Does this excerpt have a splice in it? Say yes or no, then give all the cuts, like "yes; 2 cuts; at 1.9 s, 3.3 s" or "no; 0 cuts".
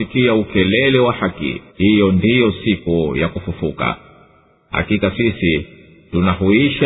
yes; 1 cut; at 1.7 s